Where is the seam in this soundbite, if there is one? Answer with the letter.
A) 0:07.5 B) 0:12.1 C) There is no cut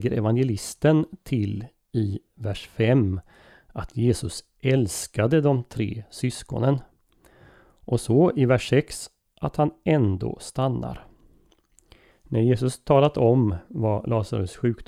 B